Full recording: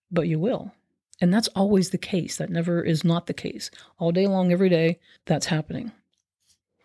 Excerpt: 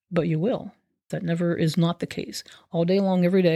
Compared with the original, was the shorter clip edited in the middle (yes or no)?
yes